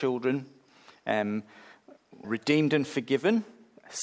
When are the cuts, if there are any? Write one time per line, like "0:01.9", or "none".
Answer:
0:02.2